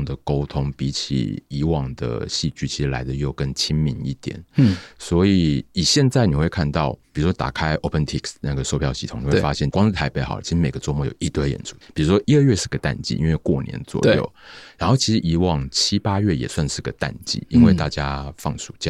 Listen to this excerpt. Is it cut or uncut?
cut